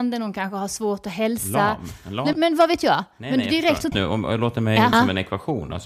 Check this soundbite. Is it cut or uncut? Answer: cut